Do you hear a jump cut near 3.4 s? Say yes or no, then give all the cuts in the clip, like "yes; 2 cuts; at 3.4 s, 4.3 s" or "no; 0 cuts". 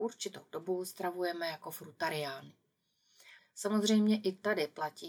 yes; 1 cut; at 3.4 s